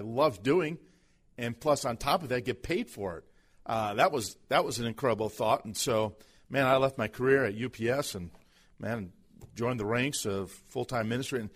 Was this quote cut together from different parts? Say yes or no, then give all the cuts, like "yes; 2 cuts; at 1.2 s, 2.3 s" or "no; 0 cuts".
no; 0 cuts